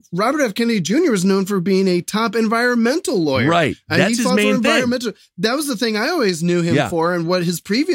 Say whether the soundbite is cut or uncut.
uncut